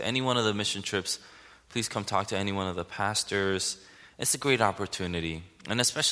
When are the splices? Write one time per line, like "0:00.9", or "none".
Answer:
none